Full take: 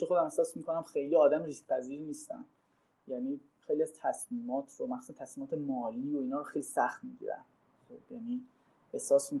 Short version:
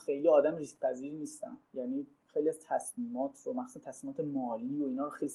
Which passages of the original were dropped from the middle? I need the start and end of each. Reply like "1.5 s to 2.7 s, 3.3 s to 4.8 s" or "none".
2.5 s to 3.0 s